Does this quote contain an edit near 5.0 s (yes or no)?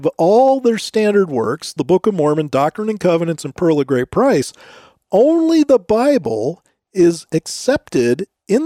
no